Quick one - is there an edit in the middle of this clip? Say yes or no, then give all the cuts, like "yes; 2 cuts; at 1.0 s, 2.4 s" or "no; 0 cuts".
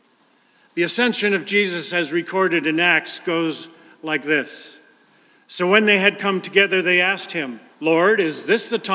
yes; 1 cut; at 7.7 s